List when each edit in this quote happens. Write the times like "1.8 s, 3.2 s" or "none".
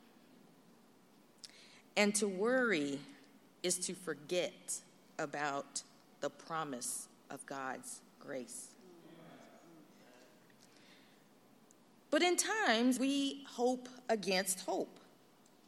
13.0 s